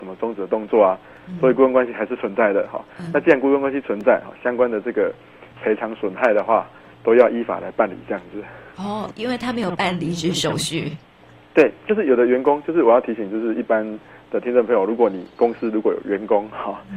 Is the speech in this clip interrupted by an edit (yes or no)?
no